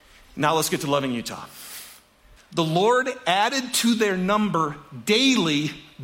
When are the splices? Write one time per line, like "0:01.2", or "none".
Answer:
0:02.4